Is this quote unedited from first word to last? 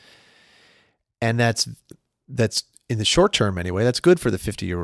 yes; 0 cuts

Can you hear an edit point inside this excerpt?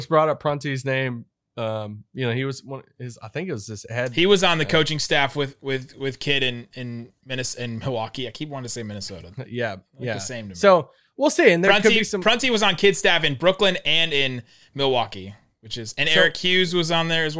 no; 0 cuts

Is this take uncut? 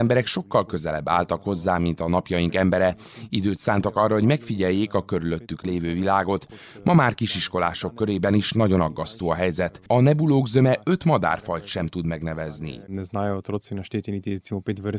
yes; 0 cuts

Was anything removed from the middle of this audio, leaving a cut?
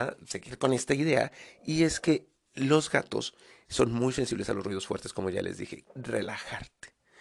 yes; 1 cut; at 5.9 s

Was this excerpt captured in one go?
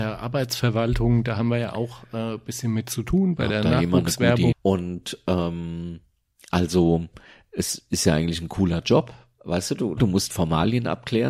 no; 2 cuts; at 4.5 s, 10.0 s

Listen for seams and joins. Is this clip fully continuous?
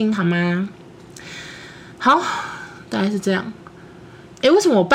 yes; 0 cuts

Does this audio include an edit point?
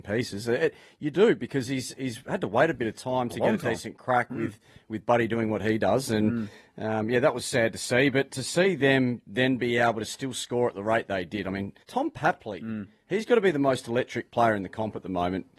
yes; 1 cut; at 11.8 s

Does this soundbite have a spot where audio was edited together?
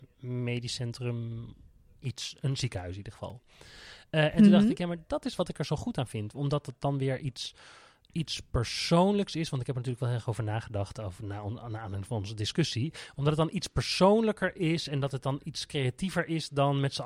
no; 0 cuts

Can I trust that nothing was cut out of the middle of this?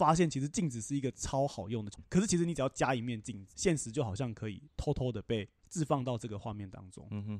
no; 1 cut; at 2.0 s

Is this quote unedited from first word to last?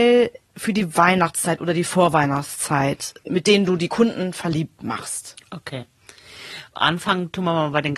yes; 0 cuts

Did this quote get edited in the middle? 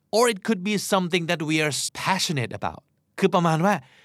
yes; 1 cut; at 1.9 s

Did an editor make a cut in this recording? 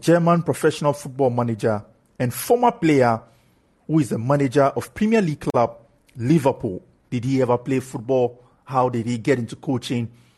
yes; 1 cut; at 7.1 s

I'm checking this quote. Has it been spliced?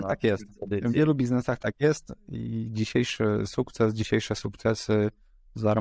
no; 0 cuts

